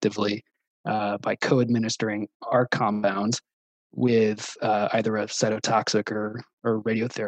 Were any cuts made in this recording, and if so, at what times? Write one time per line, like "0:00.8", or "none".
none